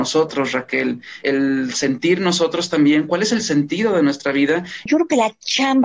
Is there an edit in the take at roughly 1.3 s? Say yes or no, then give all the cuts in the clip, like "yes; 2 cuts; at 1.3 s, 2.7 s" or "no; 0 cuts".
no; 1 cut; at 4.9 s